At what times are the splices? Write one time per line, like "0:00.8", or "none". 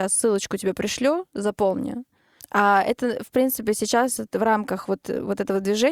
0:02.4